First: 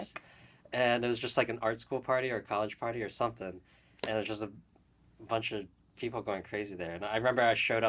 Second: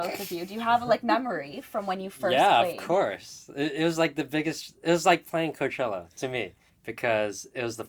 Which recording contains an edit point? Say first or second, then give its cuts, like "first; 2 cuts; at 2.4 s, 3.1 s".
second; 1 cut; at 6.7 s